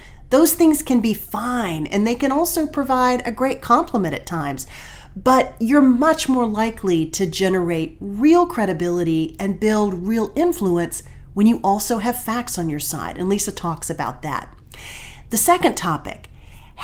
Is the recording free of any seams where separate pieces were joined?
yes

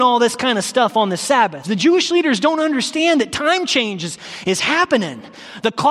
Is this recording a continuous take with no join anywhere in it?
no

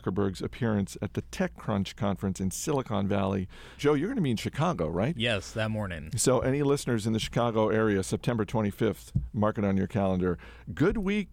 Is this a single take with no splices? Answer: no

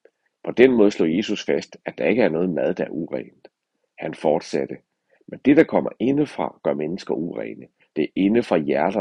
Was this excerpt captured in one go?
yes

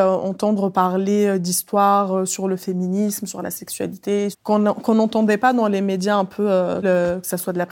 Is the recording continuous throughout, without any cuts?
no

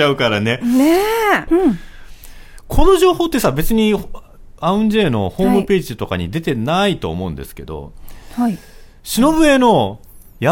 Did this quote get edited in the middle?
yes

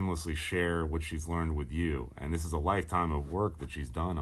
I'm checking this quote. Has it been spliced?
no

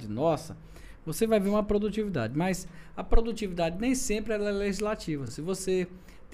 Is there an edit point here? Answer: no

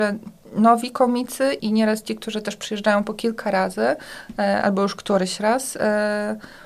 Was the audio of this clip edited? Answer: yes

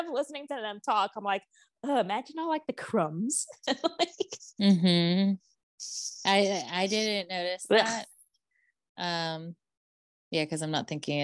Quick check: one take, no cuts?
yes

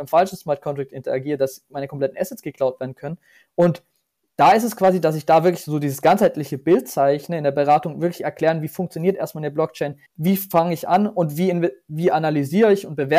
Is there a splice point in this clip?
yes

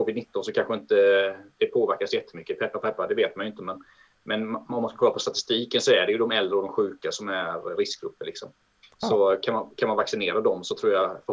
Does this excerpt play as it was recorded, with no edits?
yes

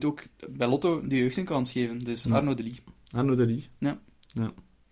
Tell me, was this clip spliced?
no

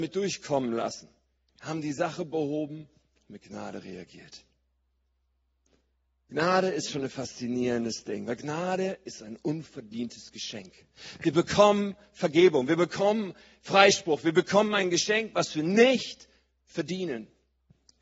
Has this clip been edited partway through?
no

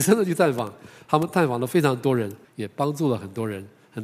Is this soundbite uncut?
no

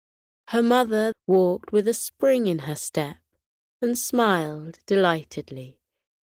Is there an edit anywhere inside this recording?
yes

